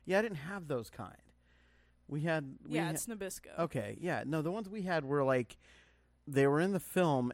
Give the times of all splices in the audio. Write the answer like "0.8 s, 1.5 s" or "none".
6.2 s